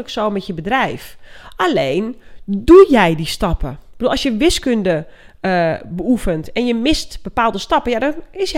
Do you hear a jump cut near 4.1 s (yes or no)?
no